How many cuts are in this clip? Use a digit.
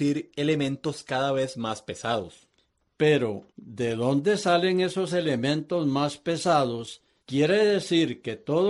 2